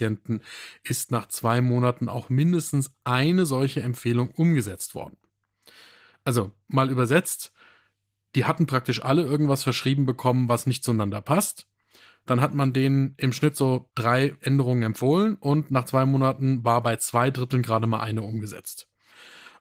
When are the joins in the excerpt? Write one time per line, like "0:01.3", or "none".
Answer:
none